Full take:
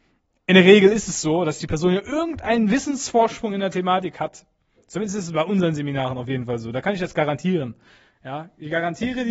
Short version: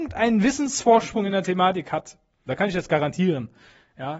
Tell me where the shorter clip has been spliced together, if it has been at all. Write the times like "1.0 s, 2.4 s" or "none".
2.5 s